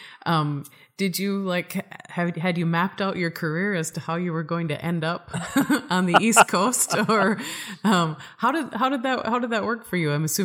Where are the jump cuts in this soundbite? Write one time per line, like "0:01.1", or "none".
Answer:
none

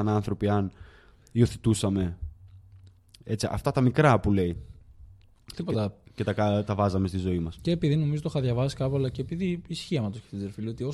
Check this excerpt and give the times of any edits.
0:07.5

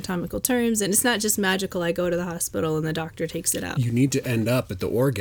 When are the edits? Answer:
0:03.7

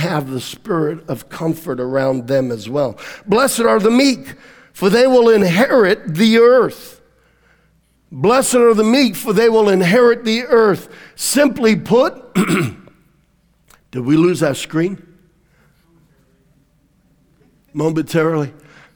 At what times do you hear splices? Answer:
none

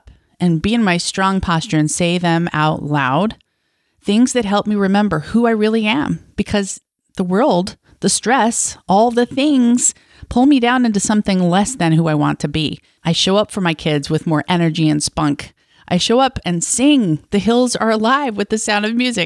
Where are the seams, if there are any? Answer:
0:13.0

